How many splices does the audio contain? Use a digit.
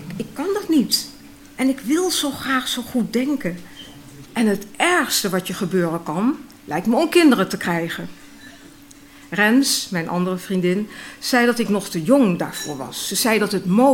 1